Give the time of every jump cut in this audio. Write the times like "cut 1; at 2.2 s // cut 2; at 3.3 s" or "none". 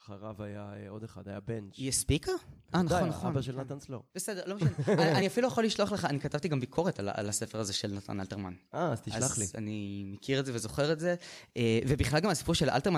none

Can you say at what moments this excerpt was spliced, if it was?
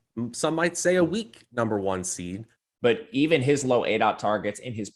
cut 1; at 2.7 s

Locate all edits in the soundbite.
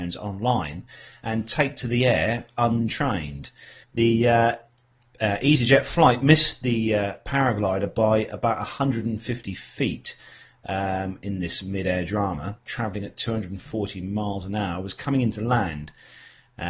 cut 1; at 3.8 s // cut 2; at 12.7 s

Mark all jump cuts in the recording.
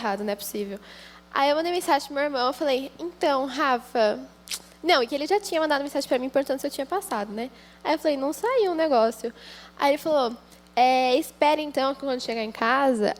none

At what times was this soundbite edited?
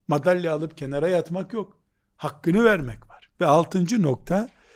cut 1; at 3.3 s

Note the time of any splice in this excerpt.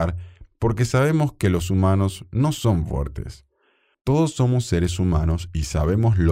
cut 1; at 3.9 s

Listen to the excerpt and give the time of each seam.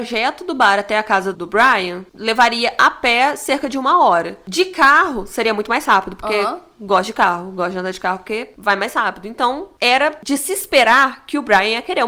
cut 1; at 1.3 s

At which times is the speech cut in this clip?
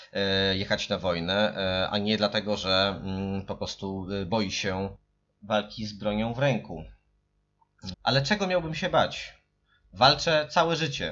cut 1; at 7.9 s

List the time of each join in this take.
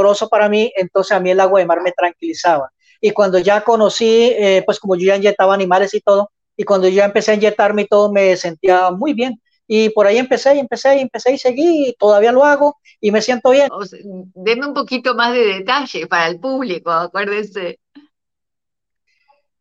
cut 1; at 13.7 s

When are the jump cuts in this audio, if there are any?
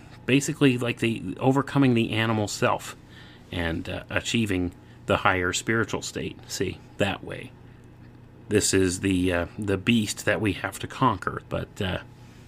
cut 1; at 7.0 s // cut 2; at 11.4 s

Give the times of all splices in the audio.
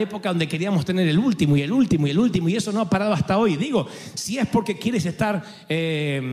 none

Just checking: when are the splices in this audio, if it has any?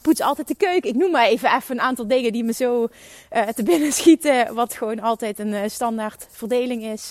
none

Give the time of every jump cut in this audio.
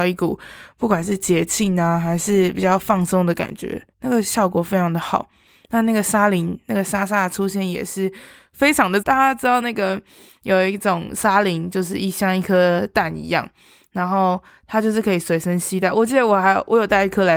cut 1; at 9.0 s

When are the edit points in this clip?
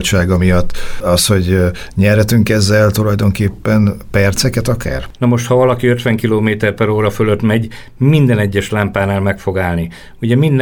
cut 1; at 5.1 s

